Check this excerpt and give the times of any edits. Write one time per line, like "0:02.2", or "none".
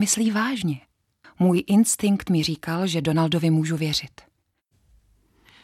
0:01.2

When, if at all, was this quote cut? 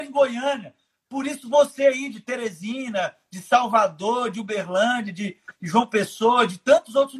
none

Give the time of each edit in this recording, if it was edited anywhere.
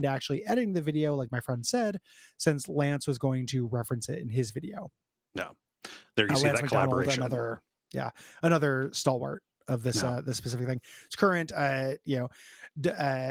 none

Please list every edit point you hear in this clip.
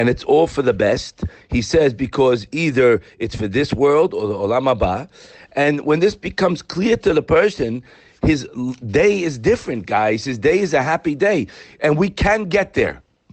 none

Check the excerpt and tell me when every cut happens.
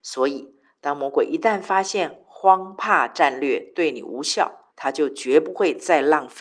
0:04.7

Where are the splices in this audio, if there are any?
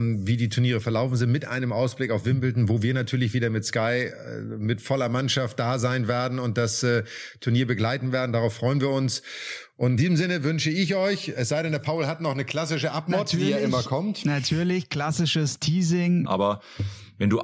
0:16.2

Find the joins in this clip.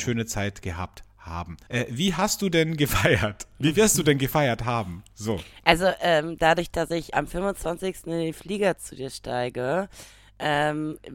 0:01.7
0:07.1

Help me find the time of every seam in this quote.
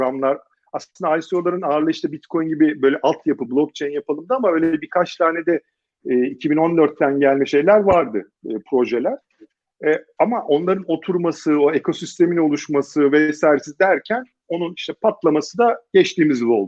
none

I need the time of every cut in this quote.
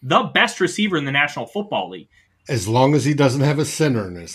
0:02.3

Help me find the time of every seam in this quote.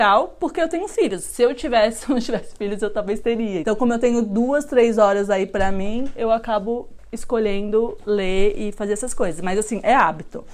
0:03.6

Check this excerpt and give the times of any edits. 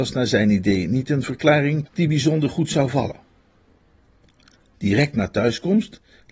0:04.8

